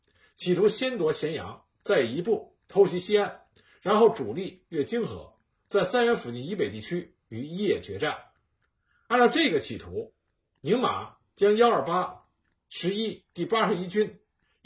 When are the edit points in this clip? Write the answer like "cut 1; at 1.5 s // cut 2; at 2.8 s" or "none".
none